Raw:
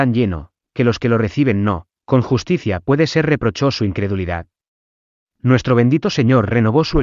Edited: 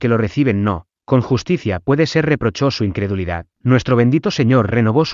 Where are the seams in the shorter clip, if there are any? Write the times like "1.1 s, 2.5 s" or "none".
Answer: 3.5 s